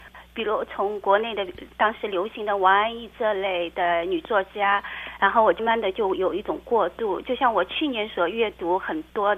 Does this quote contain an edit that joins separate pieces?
yes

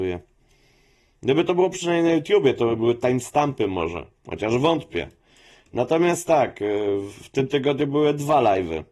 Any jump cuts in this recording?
no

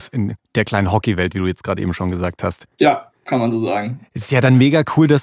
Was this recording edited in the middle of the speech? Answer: yes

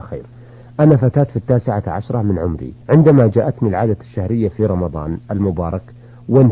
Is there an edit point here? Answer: yes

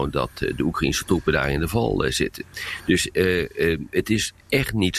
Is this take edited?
no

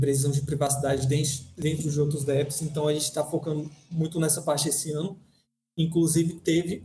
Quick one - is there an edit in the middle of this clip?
no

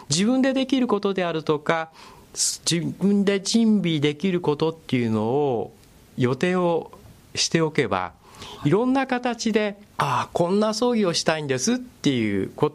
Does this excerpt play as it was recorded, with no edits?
yes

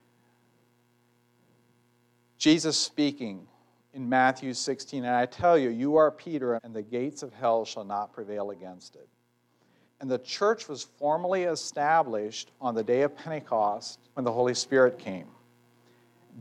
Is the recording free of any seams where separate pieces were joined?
no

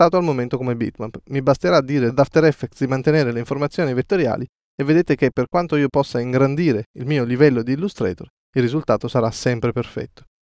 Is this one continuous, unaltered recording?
yes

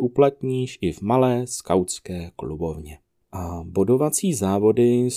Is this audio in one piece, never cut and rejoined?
no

